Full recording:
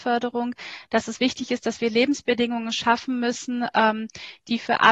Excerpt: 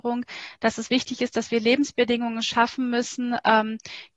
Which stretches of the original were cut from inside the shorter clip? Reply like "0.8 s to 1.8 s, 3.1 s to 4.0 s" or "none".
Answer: none

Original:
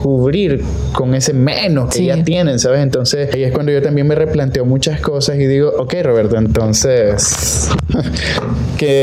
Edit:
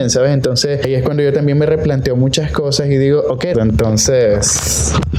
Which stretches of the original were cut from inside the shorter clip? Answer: 6.0 s to 6.3 s

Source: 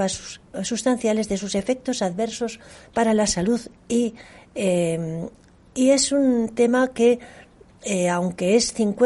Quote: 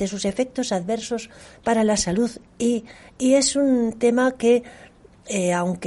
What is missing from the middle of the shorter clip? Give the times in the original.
4.4 s to 5.6 s

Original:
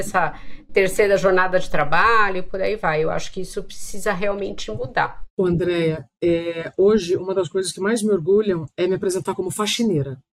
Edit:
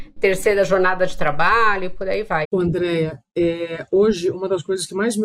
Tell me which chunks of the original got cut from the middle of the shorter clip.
3.0 s to 5.3 s

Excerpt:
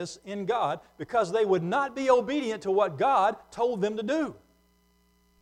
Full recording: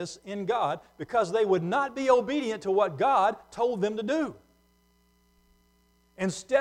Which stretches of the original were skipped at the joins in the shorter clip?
none

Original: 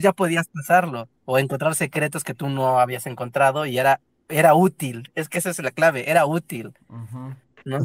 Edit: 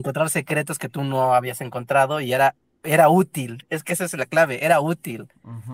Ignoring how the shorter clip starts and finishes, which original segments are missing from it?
none

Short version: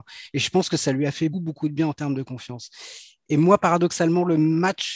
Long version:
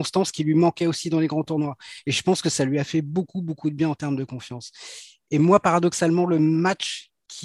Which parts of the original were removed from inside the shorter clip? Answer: 3.0 s to 3.3 s

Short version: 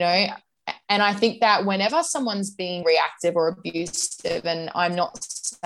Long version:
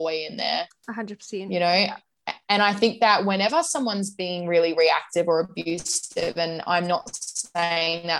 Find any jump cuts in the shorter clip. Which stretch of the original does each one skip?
4.4 s to 4.7 s

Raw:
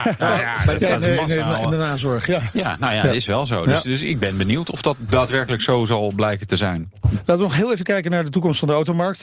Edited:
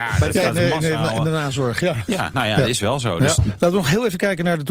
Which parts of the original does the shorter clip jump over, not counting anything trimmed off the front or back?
3.8 s to 7.0 s

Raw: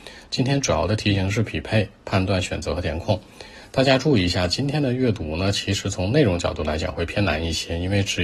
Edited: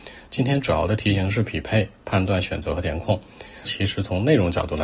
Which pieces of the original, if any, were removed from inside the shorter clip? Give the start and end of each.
3.7 s to 5.5 s

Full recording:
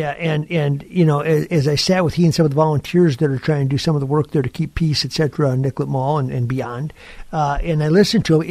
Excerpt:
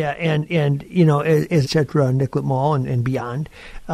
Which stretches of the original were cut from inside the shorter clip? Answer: 1.6 s to 5.1 s

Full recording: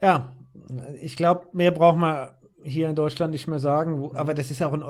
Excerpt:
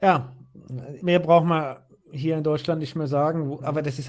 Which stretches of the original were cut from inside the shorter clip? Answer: 1.0 s to 1.5 s

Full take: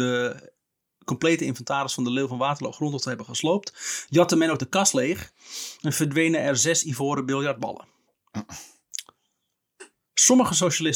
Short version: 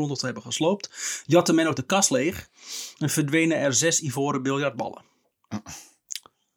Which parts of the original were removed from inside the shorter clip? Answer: none

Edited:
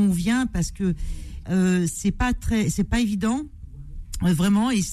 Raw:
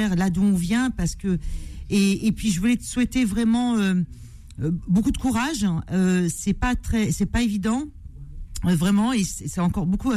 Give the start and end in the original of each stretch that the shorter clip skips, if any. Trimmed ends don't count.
1.9 s to 5.8 s

